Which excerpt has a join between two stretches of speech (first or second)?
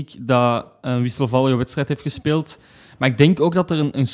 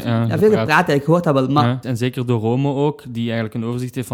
second